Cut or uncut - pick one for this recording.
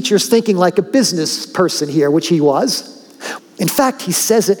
cut